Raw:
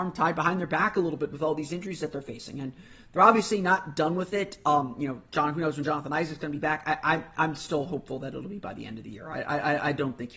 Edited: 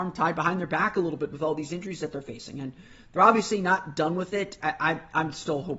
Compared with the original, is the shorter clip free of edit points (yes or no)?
no